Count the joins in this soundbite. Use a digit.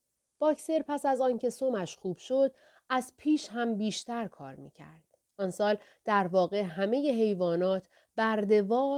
0